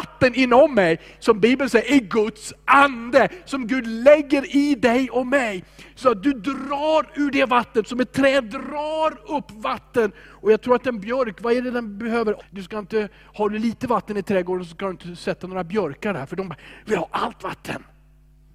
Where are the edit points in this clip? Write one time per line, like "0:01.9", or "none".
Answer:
0:12.4